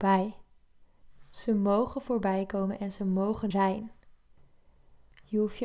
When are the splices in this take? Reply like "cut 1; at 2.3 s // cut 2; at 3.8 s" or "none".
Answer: cut 1; at 3.5 s